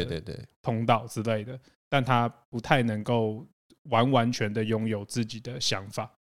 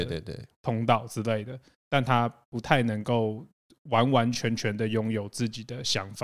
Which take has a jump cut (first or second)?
first